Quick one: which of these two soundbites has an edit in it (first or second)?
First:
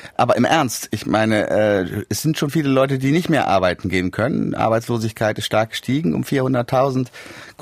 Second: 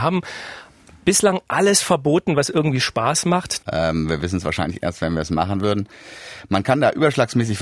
second